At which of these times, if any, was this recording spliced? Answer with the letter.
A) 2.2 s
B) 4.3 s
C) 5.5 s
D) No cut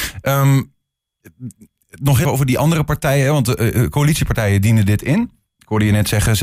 A